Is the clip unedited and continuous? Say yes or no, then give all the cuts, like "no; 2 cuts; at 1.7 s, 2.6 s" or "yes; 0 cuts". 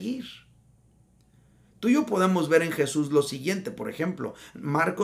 yes; 0 cuts